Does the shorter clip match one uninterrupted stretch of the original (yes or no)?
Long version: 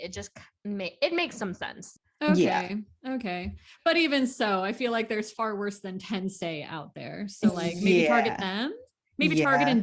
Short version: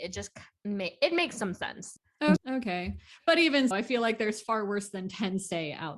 no